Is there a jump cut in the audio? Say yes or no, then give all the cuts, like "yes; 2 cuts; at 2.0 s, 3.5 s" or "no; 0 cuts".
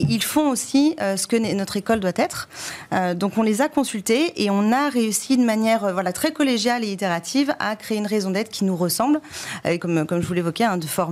yes; 1 cut; at 9.8 s